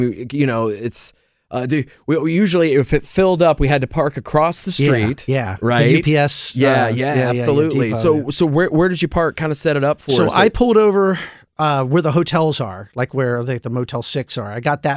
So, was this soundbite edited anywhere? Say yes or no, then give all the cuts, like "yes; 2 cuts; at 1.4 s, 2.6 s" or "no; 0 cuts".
no; 0 cuts